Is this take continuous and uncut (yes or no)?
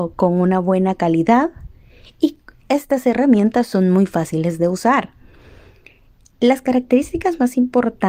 yes